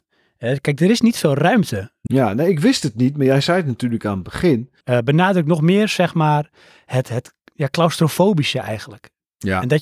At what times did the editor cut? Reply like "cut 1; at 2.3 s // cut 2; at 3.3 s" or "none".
cut 1; at 2.1 s // cut 2; at 4.8 s